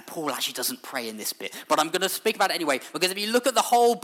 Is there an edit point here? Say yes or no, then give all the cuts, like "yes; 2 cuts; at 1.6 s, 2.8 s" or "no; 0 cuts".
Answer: no; 0 cuts